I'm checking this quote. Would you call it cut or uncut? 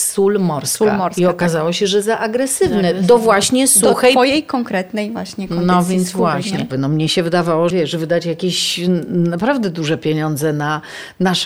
cut